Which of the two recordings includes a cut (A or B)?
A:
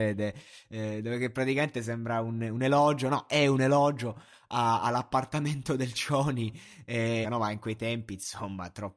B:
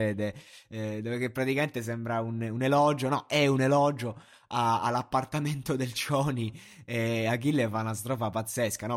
A